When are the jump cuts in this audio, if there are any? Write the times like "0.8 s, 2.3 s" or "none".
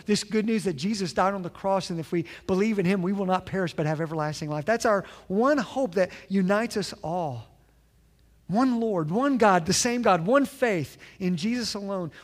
none